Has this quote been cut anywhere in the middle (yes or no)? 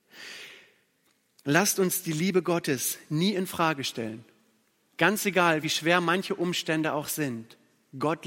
no